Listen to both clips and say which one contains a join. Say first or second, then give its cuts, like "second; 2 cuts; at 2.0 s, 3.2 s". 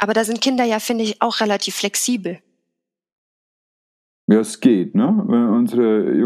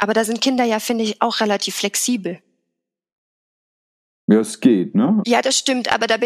second; 1 cut; at 5.2 s